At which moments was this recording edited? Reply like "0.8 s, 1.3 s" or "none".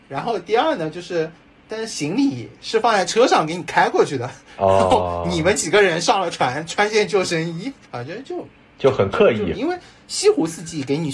7.8 s, 9.5 s

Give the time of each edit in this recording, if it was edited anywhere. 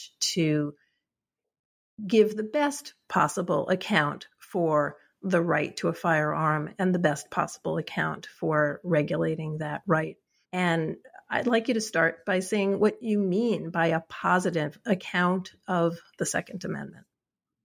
10.4 s

